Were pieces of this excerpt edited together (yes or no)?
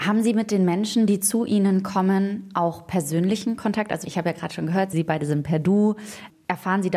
no